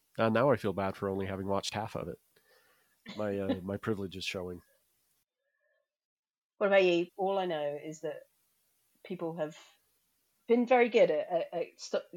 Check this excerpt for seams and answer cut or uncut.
cut